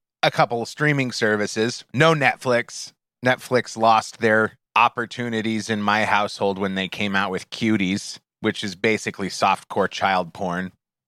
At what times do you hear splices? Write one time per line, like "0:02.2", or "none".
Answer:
0:01.9
0:04.7
0:08.3

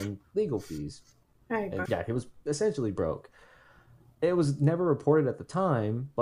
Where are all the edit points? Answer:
0:01.9

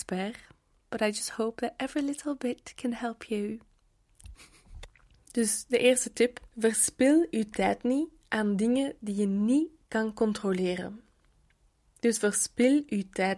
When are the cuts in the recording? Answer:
0:04.3
0:06.5

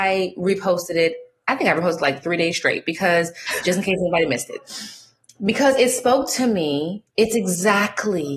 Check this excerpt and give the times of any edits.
none

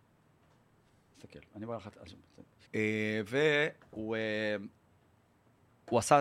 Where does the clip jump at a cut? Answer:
0:02.7

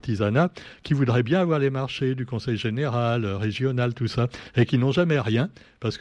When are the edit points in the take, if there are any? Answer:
none

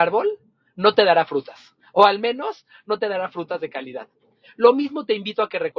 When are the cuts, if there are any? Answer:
none

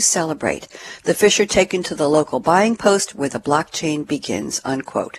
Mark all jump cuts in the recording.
none

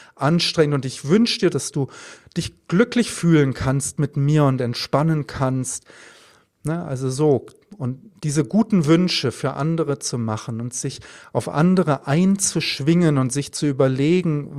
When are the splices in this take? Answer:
0:01.5

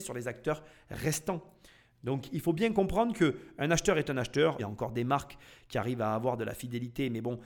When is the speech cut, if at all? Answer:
0:04.6

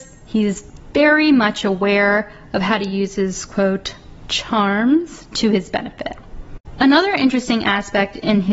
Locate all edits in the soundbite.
none

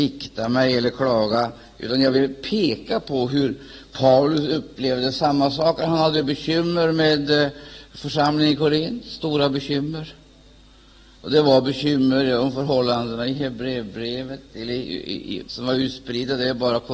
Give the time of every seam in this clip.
0:15.4

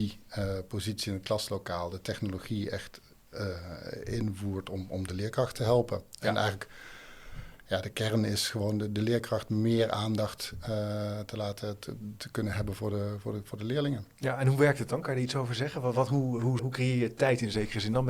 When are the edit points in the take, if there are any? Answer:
0:16.6

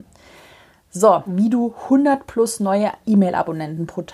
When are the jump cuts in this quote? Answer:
0:01.3

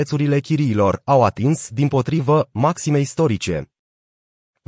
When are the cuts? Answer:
none

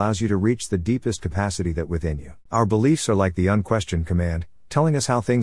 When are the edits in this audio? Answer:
0:02.5

